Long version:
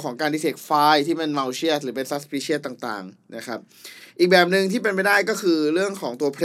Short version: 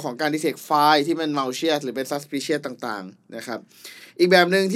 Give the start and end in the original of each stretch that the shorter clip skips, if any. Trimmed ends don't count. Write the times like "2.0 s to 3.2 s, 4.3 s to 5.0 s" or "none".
none